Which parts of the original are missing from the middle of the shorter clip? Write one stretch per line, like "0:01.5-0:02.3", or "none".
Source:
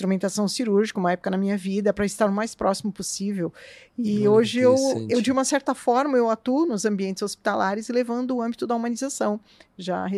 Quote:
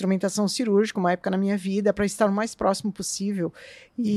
none